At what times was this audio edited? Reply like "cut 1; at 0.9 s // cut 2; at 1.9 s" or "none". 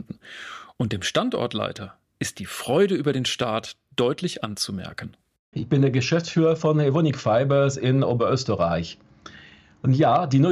cut 1; at 5.5 s

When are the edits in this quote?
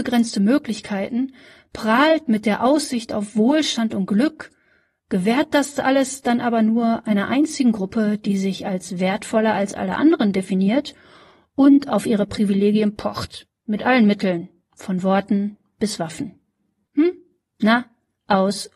cut 1; at 16.9 s

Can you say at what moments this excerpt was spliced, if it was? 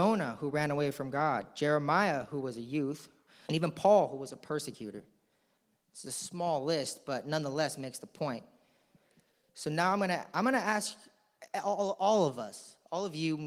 cut 1; at 3.4 s

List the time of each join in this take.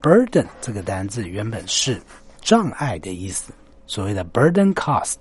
none

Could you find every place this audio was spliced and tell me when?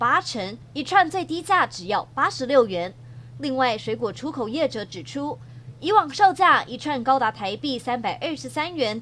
cut 1; at 3.3 s // cut 2; at 5.7 s

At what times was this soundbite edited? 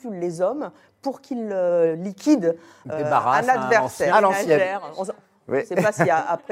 cut 1; at 4.1 s

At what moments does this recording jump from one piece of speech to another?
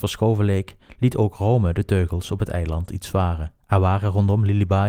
cut 1; at 3.6 s

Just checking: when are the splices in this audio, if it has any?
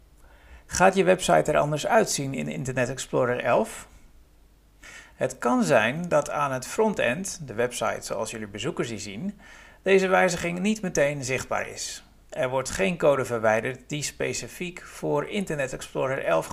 none

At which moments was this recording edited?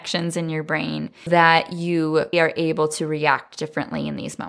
cut 1; at 1.3 s // cut 2; at 2.3 s

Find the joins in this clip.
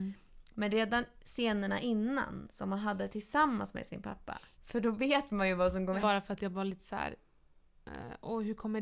cut 1; at 4.5 s // cut 2; at 6.0 s

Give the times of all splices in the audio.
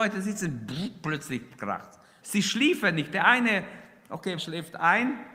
cut 1; at 2.2 s // cut 2; at 4.4 s

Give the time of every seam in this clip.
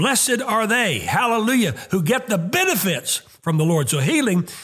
none

